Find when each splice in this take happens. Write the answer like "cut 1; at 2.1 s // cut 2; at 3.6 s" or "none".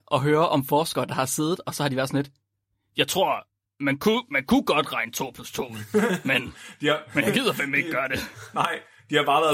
none